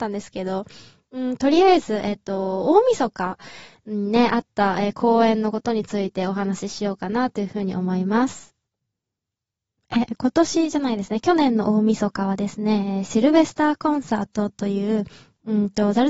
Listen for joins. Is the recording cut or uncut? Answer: uncut